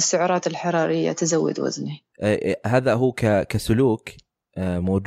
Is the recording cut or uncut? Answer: uncut